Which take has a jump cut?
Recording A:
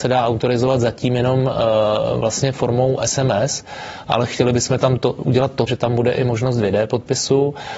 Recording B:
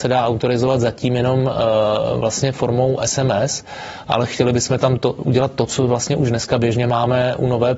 A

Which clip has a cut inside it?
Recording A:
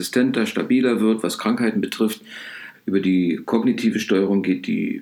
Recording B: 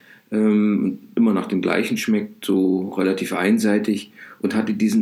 A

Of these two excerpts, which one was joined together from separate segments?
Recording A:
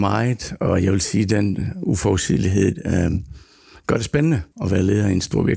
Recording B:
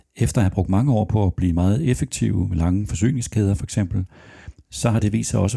A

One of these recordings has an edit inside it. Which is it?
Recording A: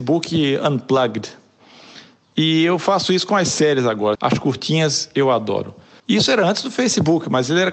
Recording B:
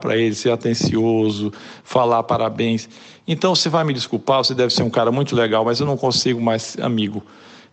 A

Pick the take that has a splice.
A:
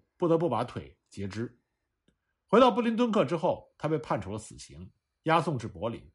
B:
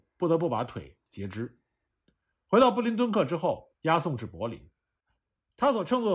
B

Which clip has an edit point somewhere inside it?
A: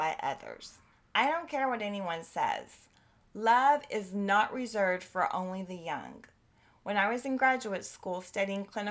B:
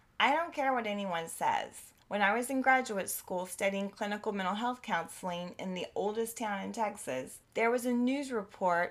B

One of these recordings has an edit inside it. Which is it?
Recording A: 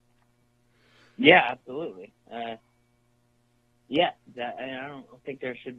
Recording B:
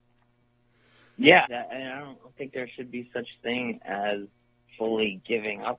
B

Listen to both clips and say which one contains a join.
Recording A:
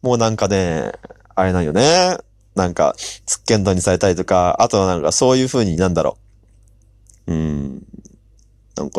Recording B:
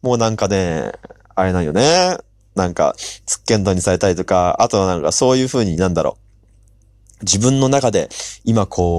A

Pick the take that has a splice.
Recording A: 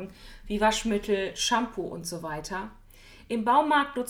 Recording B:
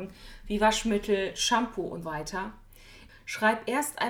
B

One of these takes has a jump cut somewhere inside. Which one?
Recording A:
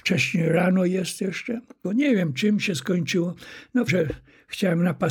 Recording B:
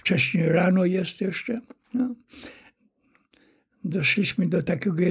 A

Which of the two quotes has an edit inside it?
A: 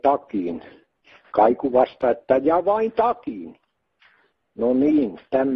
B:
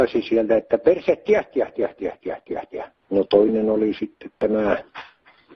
B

